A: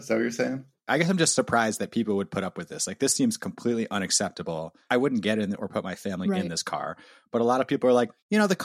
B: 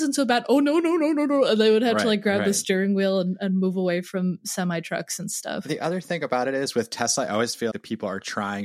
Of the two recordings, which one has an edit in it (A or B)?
B